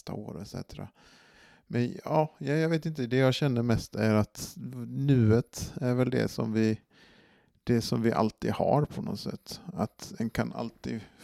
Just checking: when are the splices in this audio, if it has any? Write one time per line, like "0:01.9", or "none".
none